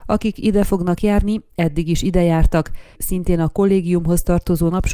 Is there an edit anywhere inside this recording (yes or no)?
yes